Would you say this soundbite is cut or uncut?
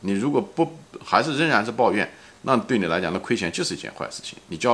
uncut